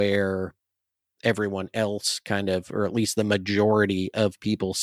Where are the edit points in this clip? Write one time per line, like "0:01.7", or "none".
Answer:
none